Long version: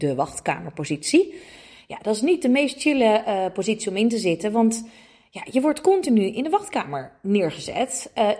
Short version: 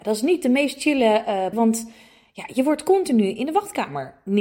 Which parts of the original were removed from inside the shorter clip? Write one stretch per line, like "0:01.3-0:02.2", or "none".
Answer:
0:03.5-0:04.5